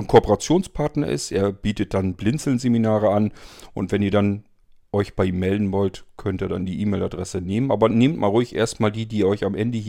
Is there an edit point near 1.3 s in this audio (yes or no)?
no